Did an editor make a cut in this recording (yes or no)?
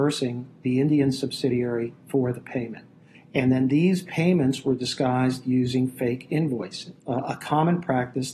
yes